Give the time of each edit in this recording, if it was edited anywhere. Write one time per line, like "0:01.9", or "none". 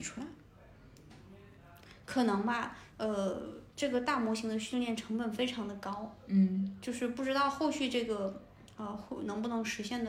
0:02.9